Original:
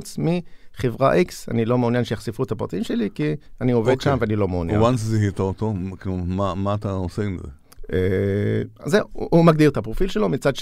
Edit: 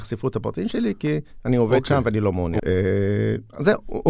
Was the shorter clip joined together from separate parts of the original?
yes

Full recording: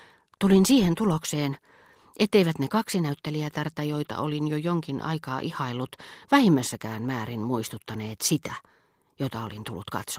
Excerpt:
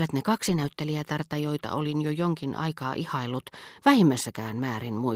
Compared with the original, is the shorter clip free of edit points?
yes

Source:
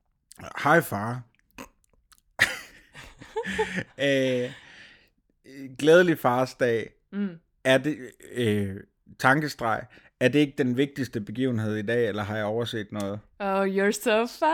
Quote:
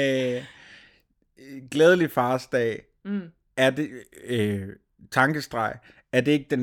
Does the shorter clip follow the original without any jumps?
yes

